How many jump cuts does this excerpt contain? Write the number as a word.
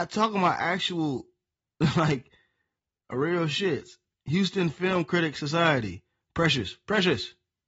zero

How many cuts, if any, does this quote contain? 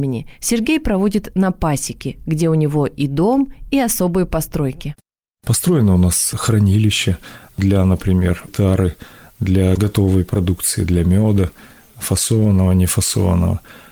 one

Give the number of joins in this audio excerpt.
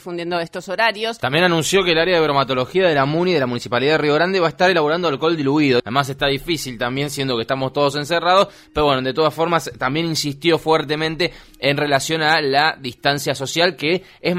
one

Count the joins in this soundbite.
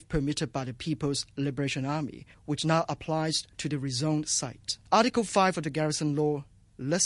two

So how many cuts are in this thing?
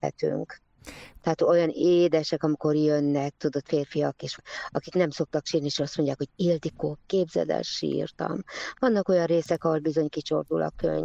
one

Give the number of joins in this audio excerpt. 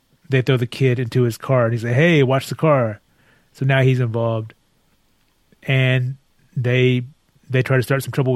zero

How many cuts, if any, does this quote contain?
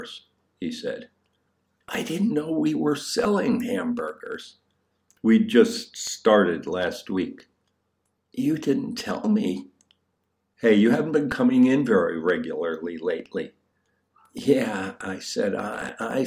one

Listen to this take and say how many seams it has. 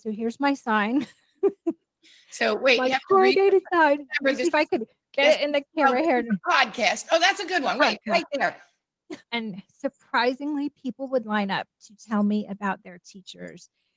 one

